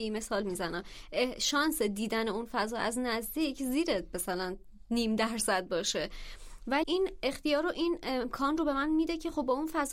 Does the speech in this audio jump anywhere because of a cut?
yes; 1 cut; at 6.8 s

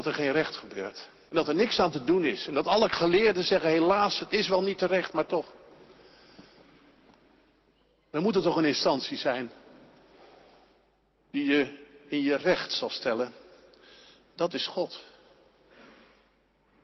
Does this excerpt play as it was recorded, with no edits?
no; 2 cuts; at 1.3 s, 4.2 s

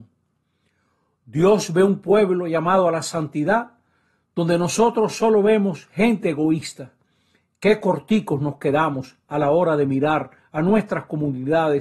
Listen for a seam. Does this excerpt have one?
no; 0 cuts

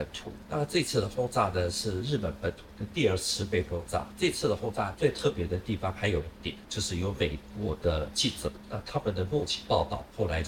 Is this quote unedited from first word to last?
yes; 0 cuts

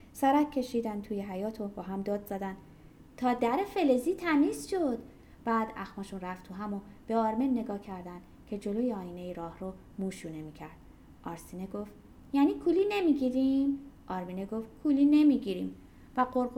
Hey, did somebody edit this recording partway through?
no; 0 cuts

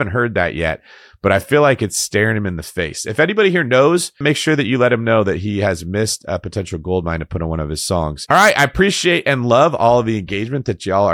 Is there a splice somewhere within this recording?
yes; 1 cut; at 4.2 s

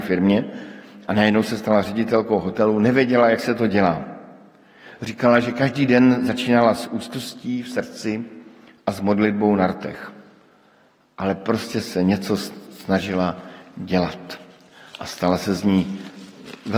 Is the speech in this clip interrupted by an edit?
no; 0 cuts

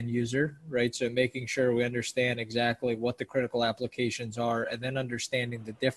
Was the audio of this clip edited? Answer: no; 0 cuts

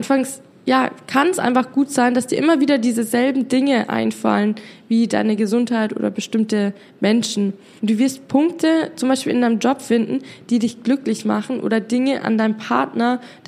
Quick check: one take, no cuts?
no; 1 cut; at 7.8 s

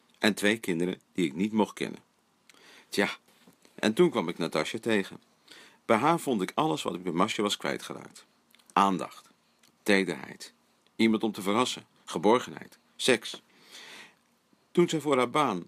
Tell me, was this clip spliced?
no; 0 cuts

